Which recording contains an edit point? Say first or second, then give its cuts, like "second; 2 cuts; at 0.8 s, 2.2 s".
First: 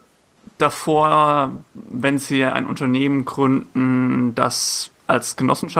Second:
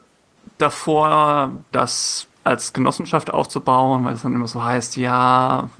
second; 1 cut; at 1.7 s